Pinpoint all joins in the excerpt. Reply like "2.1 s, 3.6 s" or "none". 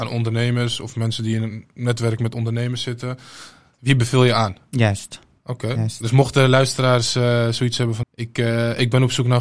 8.0 s